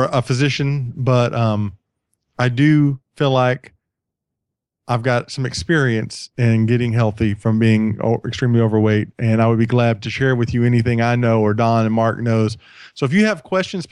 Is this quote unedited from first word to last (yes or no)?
yes